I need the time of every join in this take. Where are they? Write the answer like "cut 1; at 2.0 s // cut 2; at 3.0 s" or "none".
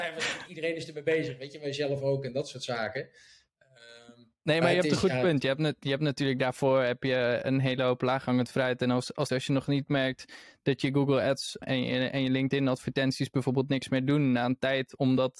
cut 1; at 9.3 s // cut 2; at 11.6 s